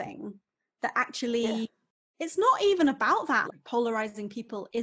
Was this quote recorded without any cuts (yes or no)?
no